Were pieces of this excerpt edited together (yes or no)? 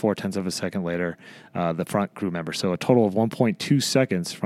no